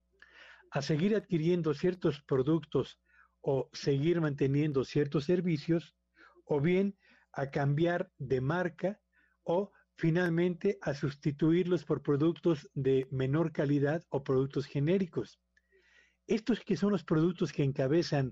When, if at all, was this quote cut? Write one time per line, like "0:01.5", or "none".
none